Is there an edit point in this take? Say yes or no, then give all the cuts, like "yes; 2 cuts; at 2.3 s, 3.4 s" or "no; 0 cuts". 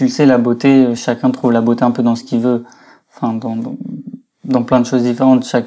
no; 0 cuts